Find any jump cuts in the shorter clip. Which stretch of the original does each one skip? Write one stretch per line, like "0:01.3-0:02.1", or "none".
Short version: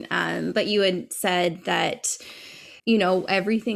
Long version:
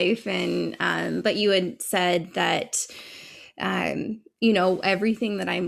0:03.5-0:04.3